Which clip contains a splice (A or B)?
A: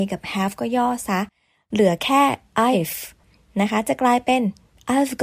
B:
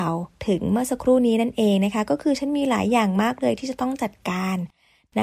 A